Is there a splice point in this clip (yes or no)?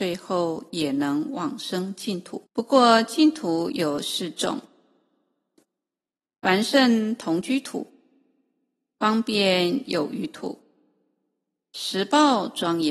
yes